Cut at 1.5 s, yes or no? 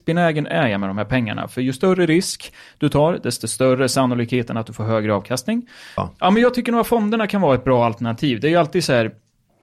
no